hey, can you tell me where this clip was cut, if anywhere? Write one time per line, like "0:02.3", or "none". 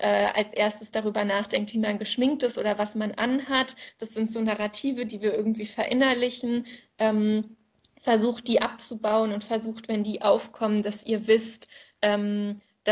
none